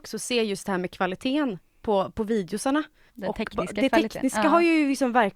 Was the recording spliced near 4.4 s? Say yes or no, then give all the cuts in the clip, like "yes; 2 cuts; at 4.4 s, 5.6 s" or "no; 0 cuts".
no; 1 cut; at 3.1 s